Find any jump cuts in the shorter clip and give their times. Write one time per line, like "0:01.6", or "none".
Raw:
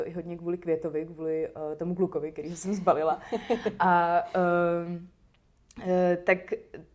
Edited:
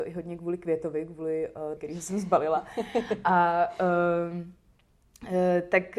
0:01.8